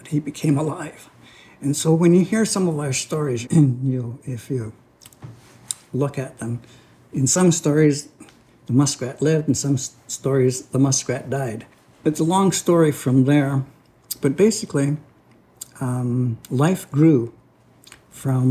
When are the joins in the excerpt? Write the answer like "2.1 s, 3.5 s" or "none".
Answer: 3.4 s